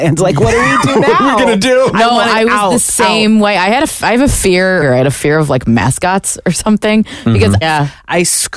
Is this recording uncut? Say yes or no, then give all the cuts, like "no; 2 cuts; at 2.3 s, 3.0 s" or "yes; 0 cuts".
no; 2 cuts; at 4.8 s, 7.6 s